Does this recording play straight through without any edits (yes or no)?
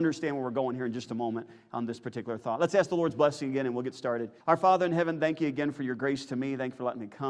no